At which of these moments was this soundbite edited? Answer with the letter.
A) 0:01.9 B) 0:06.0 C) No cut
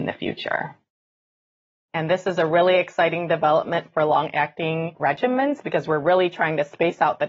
A